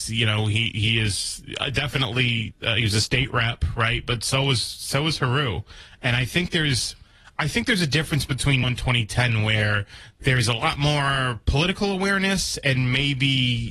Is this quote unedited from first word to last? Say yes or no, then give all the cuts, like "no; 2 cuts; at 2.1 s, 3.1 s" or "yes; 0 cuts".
no; 1 cut; at 8.6 s